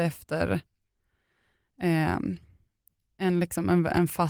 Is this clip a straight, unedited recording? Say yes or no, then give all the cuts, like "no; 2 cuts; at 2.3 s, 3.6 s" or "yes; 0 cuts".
yes; 0 cuts